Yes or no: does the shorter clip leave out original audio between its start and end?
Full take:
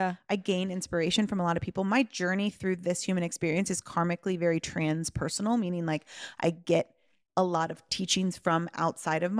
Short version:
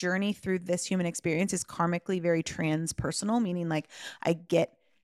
no